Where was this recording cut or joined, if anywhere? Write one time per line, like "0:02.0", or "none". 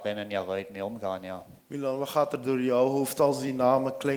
0:01.6